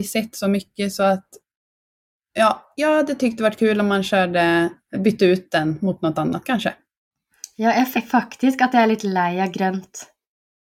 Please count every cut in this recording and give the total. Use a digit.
2